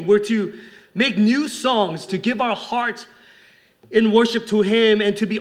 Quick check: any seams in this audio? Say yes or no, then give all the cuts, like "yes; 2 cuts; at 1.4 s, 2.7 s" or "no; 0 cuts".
yes; 1 cut; at 2.1 s